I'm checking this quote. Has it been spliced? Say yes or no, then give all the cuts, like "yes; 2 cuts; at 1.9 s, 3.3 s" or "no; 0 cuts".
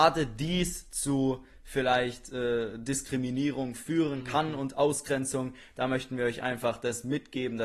no; 0 cuts